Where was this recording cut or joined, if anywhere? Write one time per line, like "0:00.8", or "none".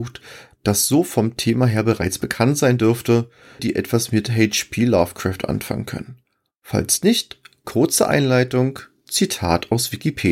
0:03.6